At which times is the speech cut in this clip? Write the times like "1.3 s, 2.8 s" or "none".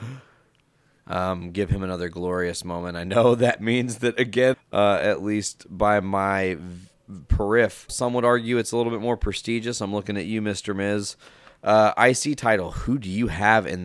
1.0 s, 4.5 s, 7.9 s